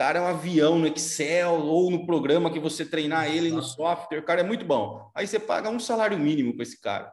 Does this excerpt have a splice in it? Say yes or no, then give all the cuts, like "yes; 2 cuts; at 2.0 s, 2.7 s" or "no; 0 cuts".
no; 0 cuts